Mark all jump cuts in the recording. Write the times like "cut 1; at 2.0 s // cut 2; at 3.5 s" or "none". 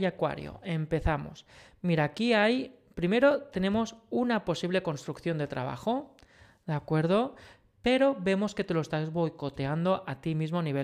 none